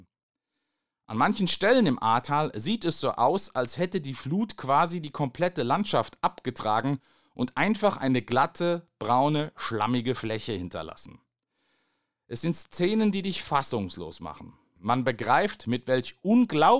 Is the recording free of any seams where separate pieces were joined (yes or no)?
yes